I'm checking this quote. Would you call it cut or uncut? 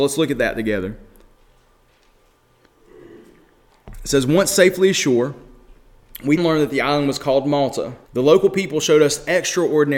cut